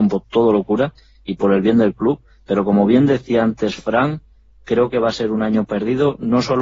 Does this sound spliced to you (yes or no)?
no